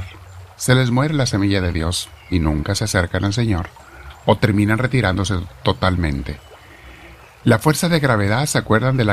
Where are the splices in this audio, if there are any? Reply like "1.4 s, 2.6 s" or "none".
none